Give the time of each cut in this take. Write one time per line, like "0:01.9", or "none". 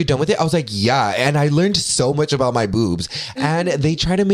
0:03.4

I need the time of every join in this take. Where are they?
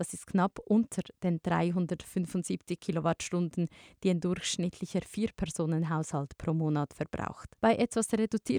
0:07.6

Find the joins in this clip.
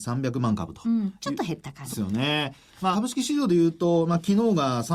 0:01.9
0:02.9

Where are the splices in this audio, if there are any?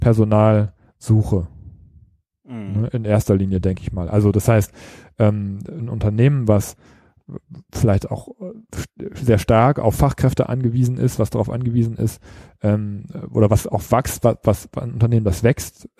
none

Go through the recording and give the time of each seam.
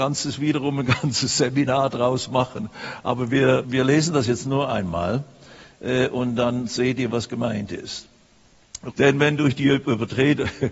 0:03.6
0:08.9

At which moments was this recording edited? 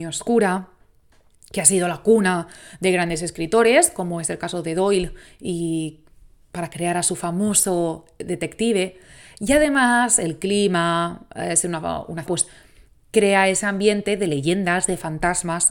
0:12.3

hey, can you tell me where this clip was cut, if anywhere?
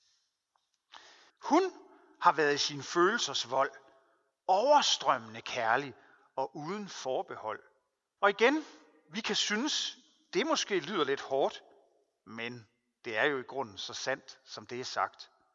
0:01.3
0:08.2

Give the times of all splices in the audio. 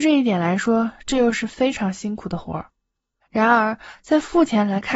0:03.2

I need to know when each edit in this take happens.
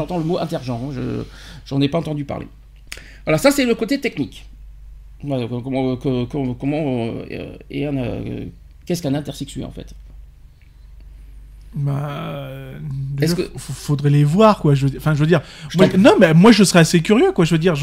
0:15.9

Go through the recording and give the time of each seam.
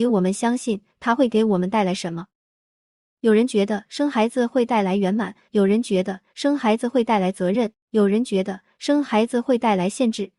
0:05.5

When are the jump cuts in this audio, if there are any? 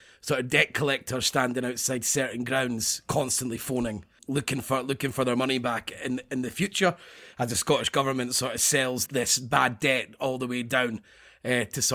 0:04.2
0:09.1

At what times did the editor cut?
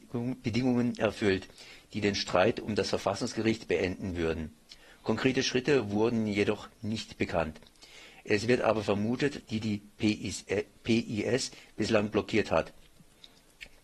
0:09.4

